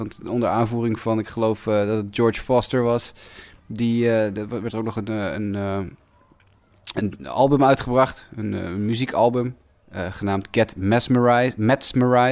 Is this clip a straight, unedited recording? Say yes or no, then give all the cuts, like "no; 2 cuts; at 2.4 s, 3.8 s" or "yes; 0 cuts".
yes; 0 cuts